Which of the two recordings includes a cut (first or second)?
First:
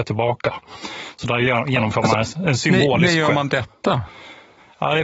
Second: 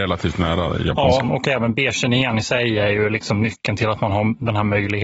second